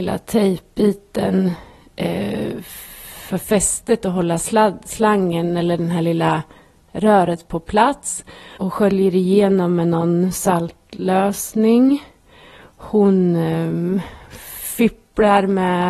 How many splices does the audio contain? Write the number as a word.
one